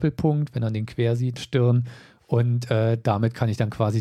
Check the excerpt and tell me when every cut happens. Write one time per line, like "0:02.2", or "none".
0:01.4